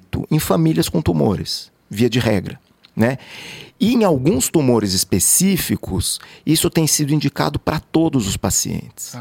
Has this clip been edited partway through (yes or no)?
no